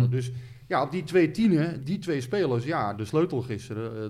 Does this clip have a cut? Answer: yes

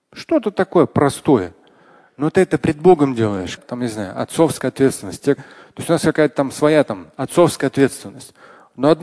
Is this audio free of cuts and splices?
no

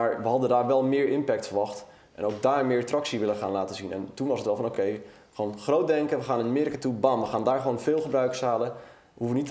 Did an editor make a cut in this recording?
no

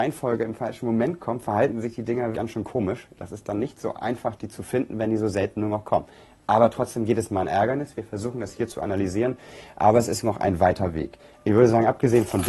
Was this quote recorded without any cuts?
no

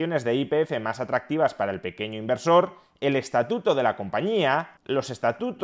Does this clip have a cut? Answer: no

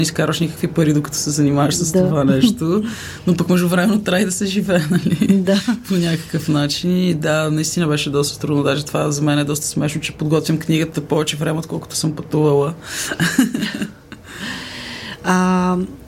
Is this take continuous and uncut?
yes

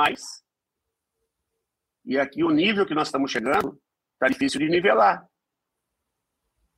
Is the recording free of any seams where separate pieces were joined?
yes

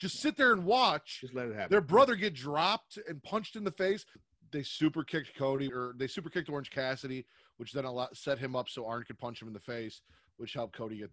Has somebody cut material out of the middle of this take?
yes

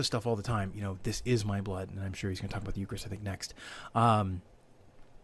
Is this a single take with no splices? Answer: no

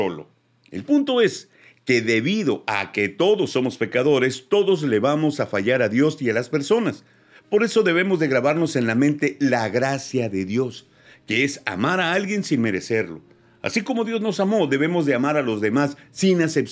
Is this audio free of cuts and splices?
yes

